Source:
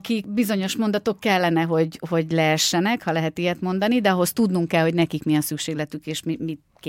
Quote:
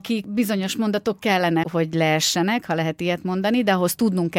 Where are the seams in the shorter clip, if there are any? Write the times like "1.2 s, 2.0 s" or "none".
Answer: 1.6 s